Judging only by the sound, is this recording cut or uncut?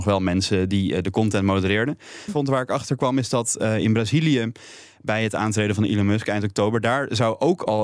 cut